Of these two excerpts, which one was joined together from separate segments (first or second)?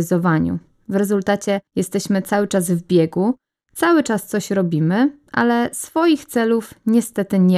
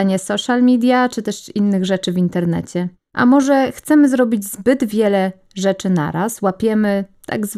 second